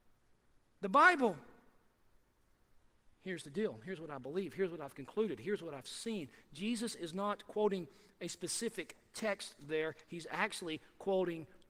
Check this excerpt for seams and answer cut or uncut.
uncut